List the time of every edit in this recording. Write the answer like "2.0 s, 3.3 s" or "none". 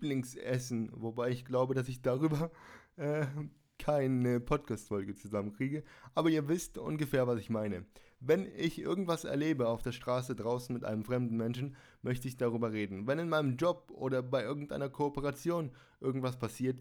none